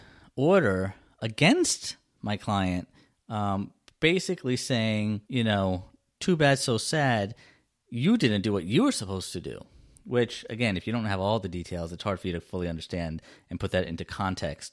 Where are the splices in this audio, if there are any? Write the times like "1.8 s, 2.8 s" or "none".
5.2 s